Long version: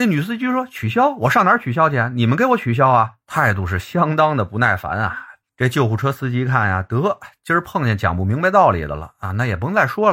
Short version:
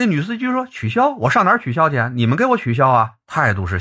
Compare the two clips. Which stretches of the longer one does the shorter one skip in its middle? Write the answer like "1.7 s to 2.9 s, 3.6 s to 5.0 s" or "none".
none